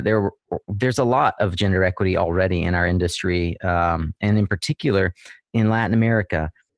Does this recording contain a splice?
no; 0 cuts

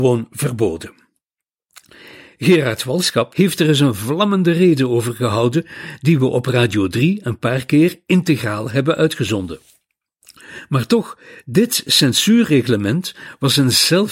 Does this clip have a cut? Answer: yes; 1 cut; at 3.3 s

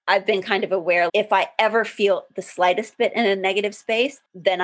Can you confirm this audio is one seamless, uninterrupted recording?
no; 1 cut; at 1.1 s

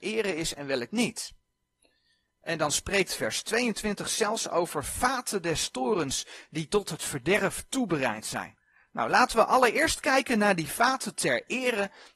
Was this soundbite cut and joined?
no; 0 cuts

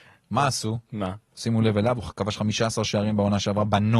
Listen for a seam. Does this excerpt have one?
yes; 1 cut; at 1.3 s

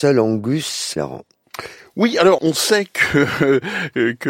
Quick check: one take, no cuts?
no; 2 cuts; at 1.0 s, 2.4 s

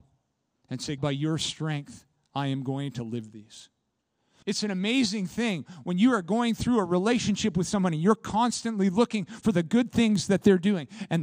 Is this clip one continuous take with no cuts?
no; 2 cuts; at 1.0 s, 4.4 s

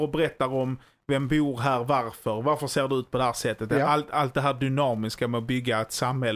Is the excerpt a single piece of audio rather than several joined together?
yes; 0 cuts

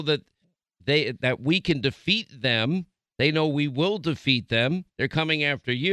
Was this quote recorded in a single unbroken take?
no; 1 cut; at 4.9 s

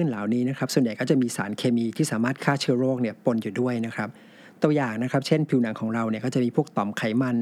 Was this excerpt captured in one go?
yes; 0 cuts

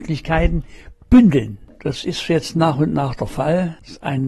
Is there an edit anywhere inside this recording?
no; 0 cuts

